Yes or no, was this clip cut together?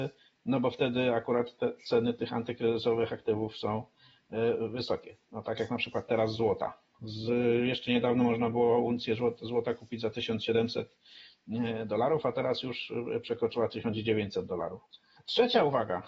no